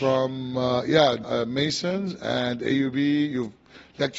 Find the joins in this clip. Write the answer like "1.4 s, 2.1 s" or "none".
1.2 s

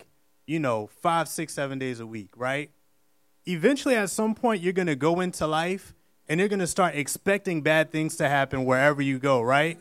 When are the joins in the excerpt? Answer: none

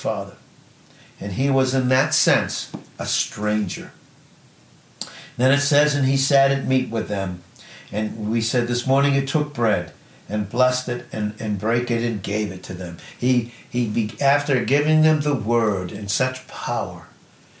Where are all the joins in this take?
none

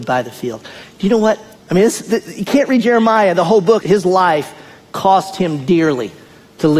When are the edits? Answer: 1.5 s, 3.8 s

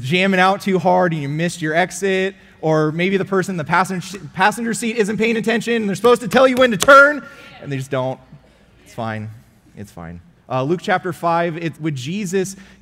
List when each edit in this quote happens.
10.4 s, 11.8 s

